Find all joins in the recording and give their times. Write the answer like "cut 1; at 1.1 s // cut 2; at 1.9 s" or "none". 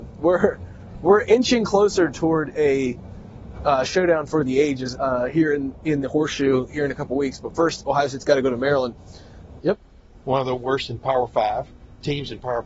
cut 1; at 4.9 s // cut 2; at 9.6 s